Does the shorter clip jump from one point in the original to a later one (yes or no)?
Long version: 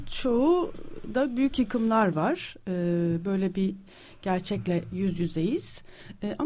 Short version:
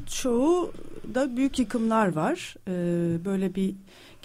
no